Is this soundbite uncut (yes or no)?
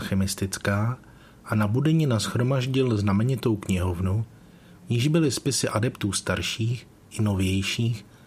yes